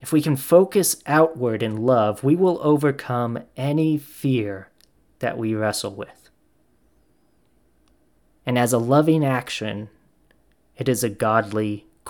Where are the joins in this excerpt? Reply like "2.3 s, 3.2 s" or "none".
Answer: 8.3 s